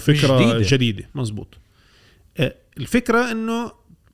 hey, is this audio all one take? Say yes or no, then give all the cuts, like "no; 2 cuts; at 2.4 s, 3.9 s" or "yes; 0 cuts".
no; 1 cut; at 1.1 s